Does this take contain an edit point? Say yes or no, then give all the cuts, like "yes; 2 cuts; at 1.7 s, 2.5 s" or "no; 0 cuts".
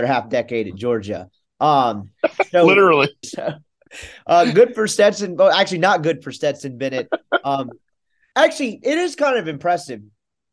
yes; 1 cut; at 3.2 s